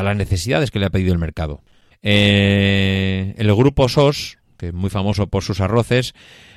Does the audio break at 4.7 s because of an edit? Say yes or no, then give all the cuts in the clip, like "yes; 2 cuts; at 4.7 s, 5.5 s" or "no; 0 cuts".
no; 1 cut; at 1.9 s